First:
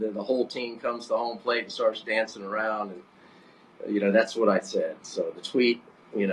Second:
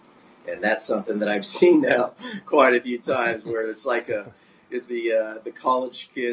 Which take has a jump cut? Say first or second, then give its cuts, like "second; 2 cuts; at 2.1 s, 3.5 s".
second; 1 cut; at 4.8 s